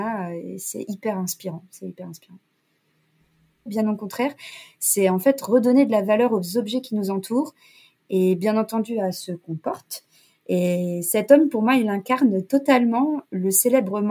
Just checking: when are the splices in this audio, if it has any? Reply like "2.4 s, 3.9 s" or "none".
3.7 s